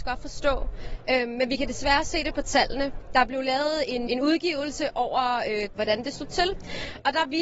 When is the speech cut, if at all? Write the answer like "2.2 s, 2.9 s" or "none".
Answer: 4.1 s, 5.7 s